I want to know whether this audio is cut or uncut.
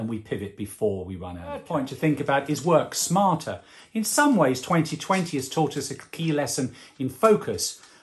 uncut